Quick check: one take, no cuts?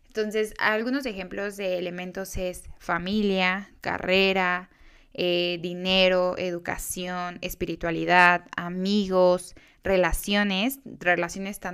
yes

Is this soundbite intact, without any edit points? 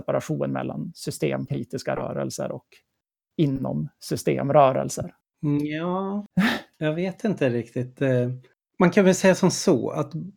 yes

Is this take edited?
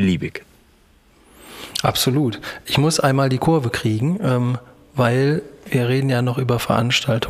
no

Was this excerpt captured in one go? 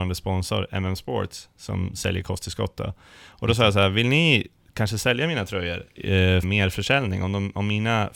no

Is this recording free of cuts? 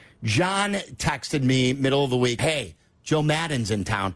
no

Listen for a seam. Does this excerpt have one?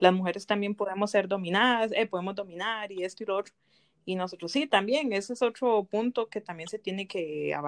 no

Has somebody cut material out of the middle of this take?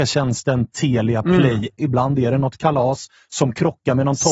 yes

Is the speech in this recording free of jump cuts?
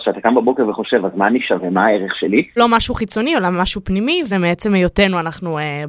no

